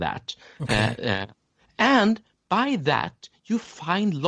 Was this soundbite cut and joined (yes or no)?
no